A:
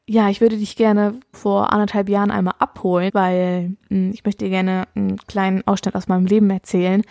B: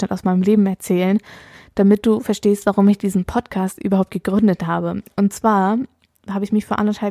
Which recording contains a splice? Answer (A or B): A